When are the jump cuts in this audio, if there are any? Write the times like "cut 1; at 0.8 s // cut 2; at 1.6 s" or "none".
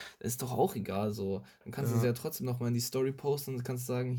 none